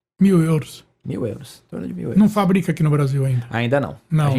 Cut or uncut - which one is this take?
uncut